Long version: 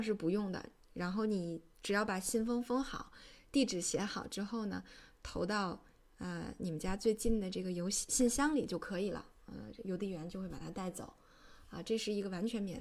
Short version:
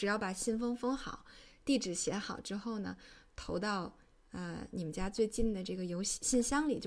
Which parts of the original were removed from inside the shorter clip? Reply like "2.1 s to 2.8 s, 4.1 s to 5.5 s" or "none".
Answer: none